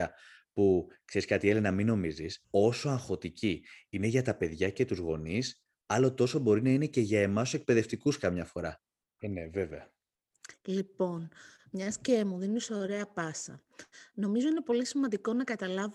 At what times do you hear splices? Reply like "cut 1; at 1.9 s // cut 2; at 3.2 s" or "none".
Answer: cut 1; at 2.4 s // cut 2; at 9.2 s // cut 3; at 10.5 s